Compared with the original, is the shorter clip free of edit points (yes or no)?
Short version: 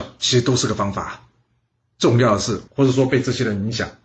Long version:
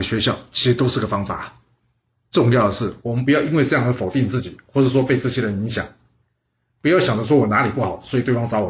no